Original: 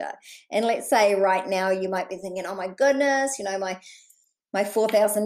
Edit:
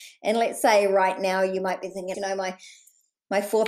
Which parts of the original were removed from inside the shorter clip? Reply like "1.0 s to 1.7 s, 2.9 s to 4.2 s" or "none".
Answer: 2.4 s to 3.4 s